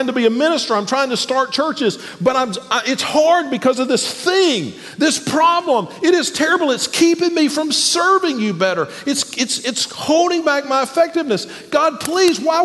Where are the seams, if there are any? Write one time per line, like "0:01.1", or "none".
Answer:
none